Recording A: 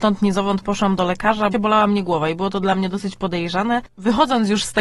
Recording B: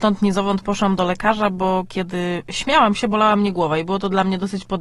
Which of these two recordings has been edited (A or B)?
A